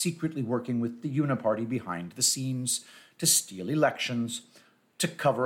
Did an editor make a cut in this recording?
no; 0 cuts

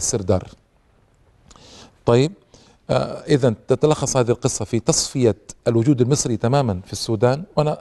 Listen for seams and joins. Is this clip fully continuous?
yes; 0 cuts

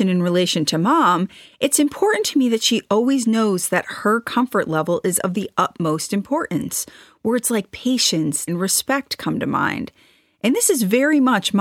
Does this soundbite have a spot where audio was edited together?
yes; 1 cut; at 8.5 s

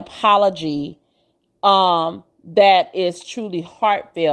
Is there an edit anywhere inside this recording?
no; 0 cuts

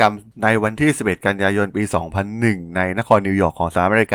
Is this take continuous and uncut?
yes; 0 cuts

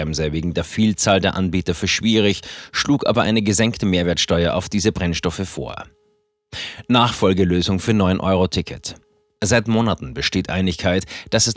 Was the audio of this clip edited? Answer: no; 0 cuts

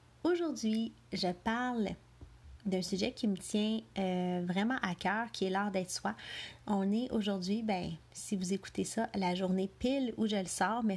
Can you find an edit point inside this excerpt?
no; 0 cuts

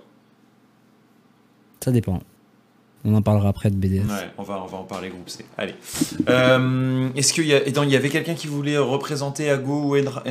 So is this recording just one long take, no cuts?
yes; 0 cuts

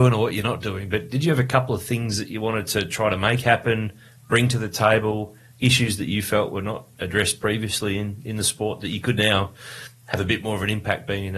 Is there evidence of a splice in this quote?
no; 0 cuts

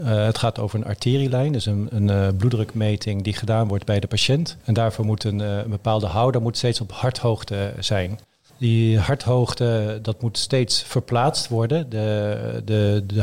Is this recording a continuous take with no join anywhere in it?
yes; 0 cuts

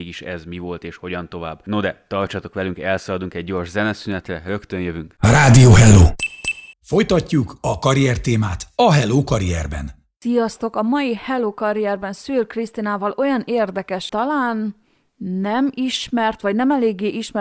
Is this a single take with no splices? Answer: no; 3 cuts; at 6.7 s, 10.1 s, 14.1 s

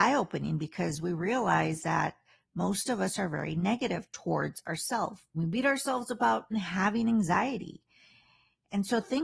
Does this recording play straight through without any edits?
no; 2 cuts; at 5.3 s, 6.5 s

